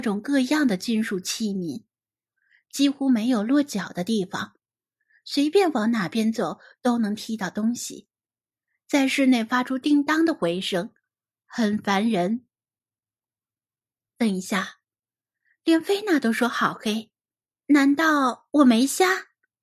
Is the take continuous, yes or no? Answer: yes